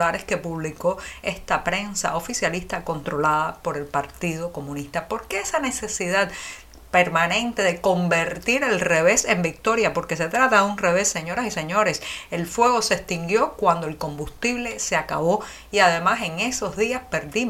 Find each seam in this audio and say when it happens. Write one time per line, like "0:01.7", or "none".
none